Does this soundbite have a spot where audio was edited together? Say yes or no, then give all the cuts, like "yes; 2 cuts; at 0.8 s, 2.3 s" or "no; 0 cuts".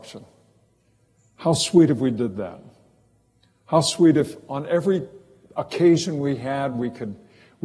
no; 0 cuts